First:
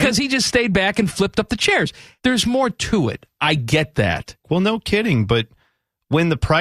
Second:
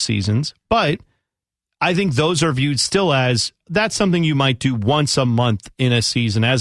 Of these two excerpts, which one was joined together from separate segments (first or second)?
first